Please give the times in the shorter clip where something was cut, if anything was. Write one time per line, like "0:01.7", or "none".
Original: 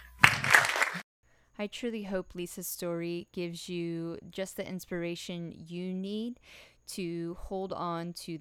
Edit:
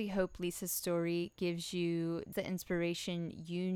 0:02.3